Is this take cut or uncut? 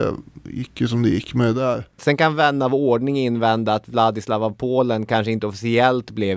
cut